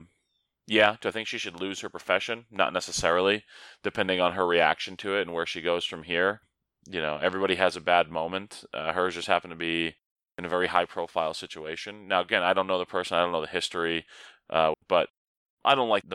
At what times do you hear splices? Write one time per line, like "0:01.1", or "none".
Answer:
0:14.7